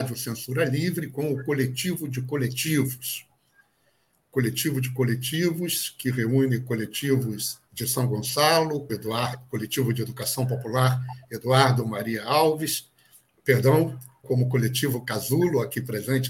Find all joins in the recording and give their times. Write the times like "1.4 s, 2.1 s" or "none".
7.7 s, 8.9 s, 14.2 s